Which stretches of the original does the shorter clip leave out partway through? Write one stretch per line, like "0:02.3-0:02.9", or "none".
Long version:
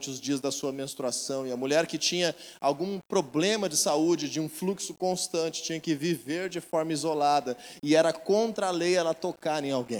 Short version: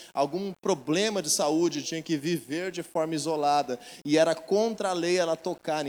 0:04.3-0:05.6